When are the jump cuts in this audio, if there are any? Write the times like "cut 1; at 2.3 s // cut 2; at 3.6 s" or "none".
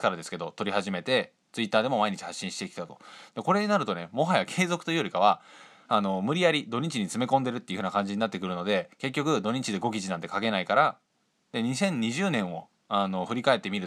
cut 1; at 3.3 s // cut 2; at 11.5 s